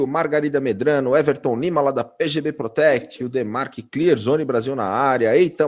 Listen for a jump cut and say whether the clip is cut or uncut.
uncut